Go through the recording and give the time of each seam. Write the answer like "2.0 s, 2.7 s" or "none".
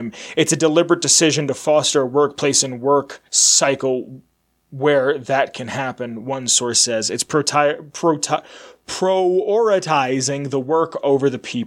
3.3 s